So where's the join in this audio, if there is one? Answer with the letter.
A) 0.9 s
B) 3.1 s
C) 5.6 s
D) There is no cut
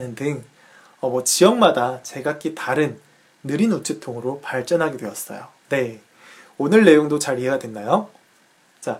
C